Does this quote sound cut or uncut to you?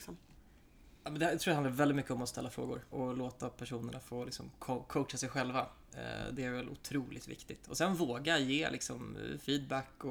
cut